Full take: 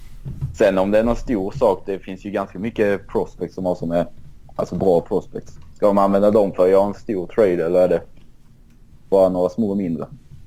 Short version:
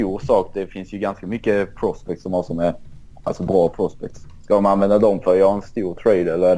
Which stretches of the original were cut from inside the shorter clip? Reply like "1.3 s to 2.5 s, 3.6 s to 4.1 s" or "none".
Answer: none